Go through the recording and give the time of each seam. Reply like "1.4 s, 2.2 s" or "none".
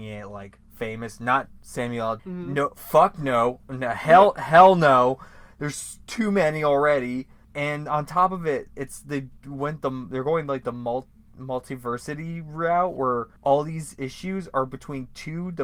2.2 s, 7.4 s, 13.4 s